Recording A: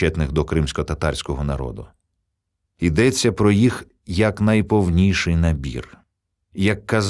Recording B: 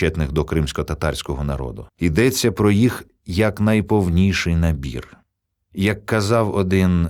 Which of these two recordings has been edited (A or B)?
B